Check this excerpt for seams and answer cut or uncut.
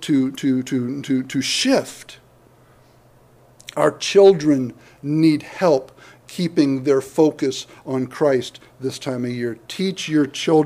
uncut